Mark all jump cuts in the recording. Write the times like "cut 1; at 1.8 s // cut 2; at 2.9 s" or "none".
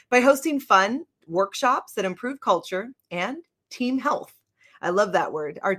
none